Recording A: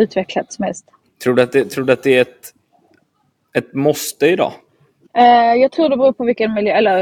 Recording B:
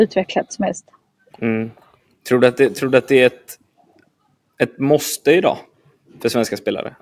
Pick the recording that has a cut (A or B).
A